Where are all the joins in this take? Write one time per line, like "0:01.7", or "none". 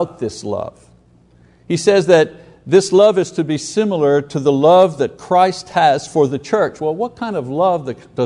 none